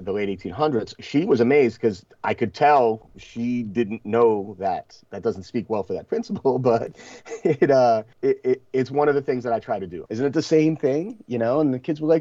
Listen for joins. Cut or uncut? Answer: cut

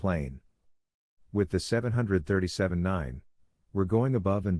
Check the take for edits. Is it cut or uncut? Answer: cut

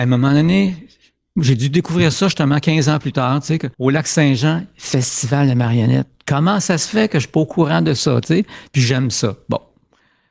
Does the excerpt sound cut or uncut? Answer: cut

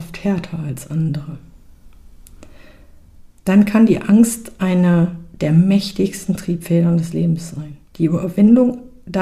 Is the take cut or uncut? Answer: cut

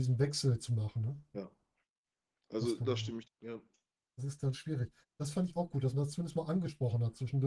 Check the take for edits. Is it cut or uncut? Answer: cut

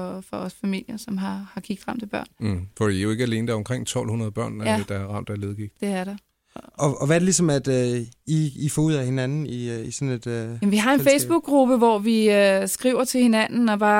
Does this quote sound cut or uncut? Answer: uncut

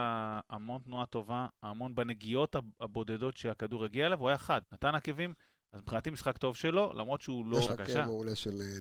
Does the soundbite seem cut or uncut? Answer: cut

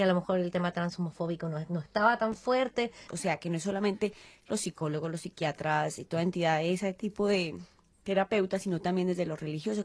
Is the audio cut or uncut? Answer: cut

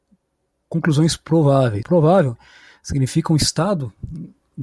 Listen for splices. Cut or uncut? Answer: cut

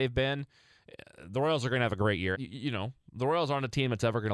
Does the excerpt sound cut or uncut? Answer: cut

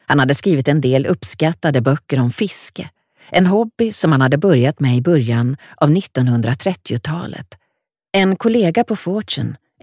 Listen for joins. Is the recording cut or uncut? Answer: cut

